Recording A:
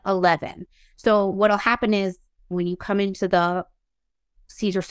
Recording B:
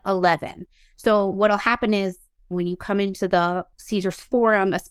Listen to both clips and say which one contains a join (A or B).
B